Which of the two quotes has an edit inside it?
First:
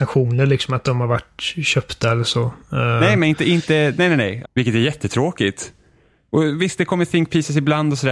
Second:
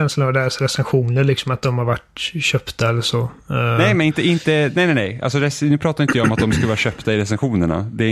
first; 1 cut; at 4.4 s

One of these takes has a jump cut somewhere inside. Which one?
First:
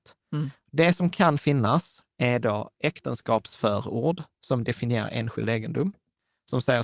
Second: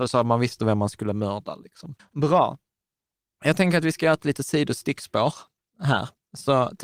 second; 1 cut; at 2.0 s

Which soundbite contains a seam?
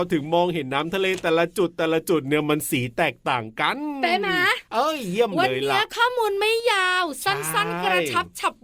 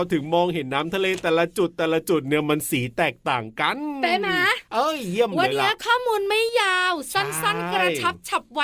second; 1 cut; at 5.5 s

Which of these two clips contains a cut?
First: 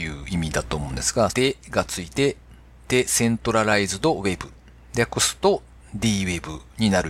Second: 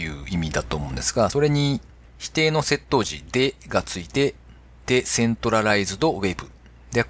first; 1 cut; at 1.3 s

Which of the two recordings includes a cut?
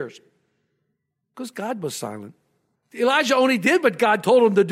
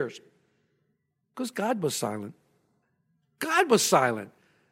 first; 1 cut; at 2.7 s

